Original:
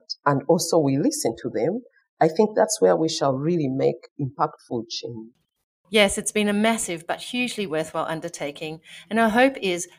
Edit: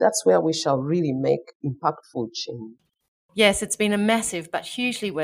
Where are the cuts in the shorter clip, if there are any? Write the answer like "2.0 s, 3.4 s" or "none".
none

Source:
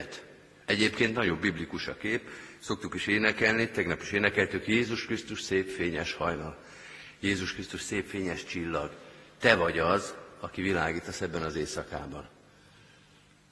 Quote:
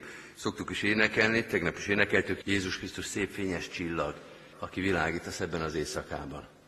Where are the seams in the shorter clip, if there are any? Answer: 2.4 s, 4.5 s

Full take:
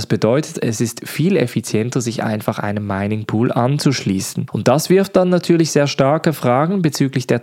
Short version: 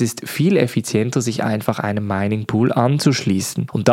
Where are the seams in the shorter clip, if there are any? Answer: none

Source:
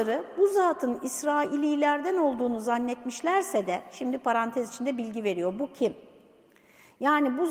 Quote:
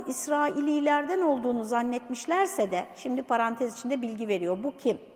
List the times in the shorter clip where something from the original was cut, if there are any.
none

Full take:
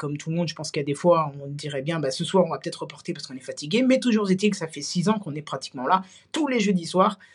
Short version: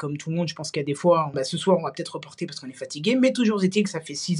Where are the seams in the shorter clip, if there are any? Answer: 1.3 s

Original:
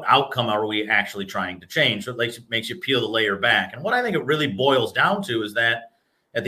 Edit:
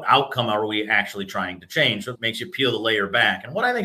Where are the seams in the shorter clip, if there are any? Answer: 2.1 s

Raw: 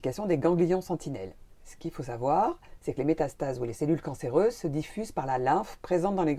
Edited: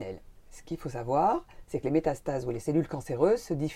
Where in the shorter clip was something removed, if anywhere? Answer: none

